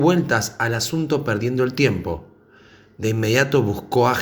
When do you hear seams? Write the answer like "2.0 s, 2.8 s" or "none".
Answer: none